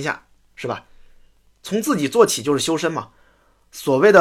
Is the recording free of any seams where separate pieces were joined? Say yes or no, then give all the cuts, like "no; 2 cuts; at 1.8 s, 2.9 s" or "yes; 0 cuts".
yes; 0 cuts